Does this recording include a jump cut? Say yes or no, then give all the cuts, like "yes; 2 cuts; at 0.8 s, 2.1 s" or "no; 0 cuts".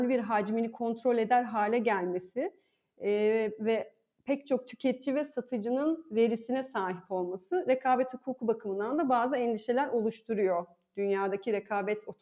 no; 0 cuts